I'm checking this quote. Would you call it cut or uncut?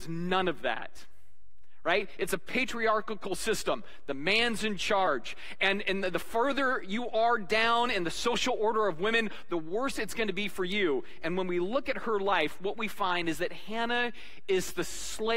uncut